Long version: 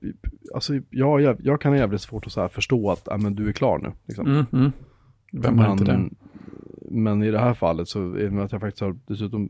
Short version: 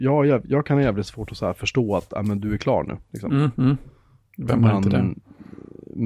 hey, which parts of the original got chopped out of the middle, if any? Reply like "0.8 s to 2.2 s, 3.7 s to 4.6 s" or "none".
none